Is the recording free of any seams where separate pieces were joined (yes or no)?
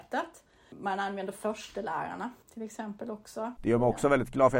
no